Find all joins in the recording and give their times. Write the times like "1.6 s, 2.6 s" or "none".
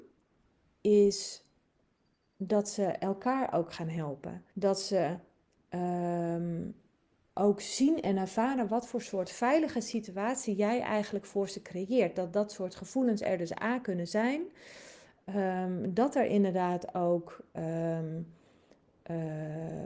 4.5 s